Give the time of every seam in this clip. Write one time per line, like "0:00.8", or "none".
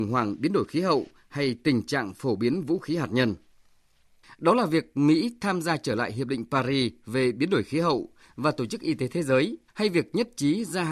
0:04.2
0:09.7